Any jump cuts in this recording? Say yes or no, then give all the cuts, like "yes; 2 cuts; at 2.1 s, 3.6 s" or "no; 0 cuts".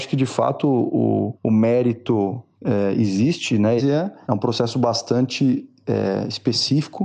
yes; 1 cut; at 3.8 s